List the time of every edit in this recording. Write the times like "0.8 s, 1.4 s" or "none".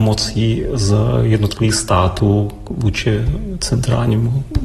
none